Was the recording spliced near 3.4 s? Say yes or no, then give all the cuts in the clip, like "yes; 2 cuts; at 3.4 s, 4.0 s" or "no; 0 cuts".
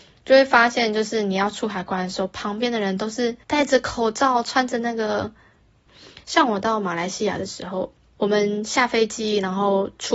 yes; 2 cuts; at 3.4 s, 5.9 s